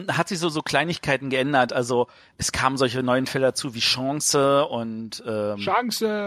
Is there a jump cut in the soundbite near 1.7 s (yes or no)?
no